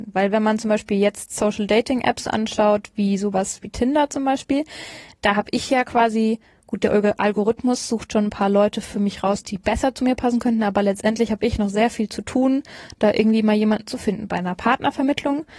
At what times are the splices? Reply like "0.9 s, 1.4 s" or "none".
none